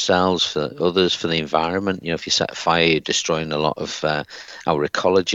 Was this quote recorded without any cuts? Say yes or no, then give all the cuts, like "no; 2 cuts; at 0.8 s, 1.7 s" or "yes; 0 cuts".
yes; 0 cuts